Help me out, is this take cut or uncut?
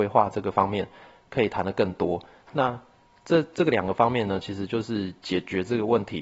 uncut